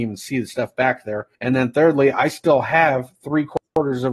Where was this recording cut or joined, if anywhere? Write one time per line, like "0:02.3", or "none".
0:01.3